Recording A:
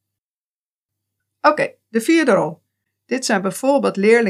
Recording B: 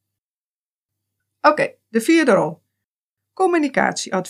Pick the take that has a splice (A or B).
A